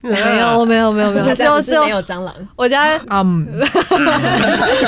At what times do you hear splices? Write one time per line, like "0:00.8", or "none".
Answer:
0:03.0